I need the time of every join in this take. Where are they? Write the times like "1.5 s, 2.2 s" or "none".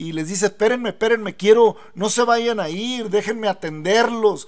none